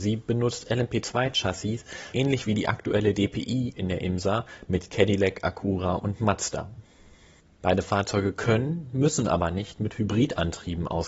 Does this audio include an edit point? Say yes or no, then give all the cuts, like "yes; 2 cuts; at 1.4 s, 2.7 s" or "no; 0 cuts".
yes; 2 cuts; at 2.1 s, 7.5 s